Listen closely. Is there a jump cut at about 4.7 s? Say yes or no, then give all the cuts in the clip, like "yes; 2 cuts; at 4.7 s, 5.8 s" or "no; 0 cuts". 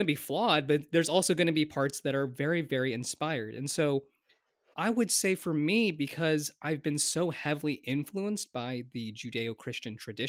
yes; 1 cut; at 4.7 s